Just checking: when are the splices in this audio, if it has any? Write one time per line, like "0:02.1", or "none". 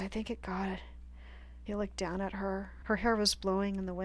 0:01.7
0:02.8

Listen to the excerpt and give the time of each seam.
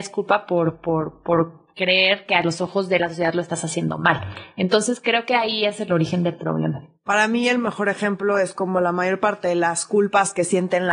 none

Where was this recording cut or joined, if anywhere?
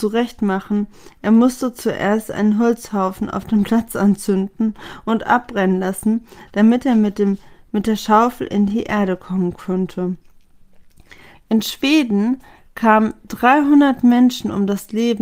0:11.3

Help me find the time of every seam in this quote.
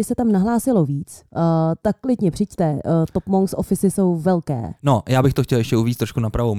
0:04.8

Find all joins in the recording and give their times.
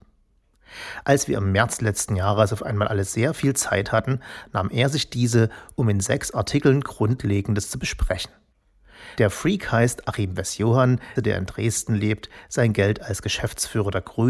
0:09.2
0:11.2

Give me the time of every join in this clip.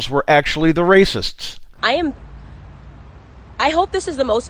0:01.8

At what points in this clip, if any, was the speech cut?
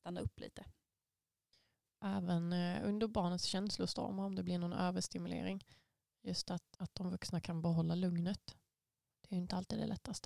0:01.8
0:06.7

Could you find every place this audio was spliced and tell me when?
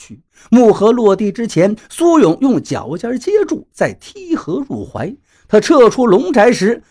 none

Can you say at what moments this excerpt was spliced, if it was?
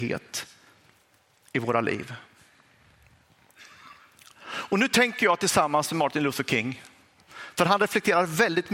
none

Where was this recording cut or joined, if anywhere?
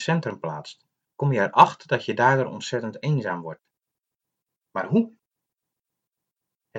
0:01.0
0:04.5

